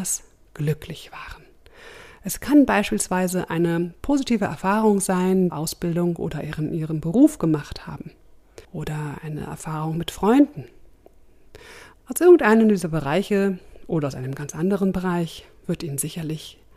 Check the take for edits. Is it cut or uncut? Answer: cut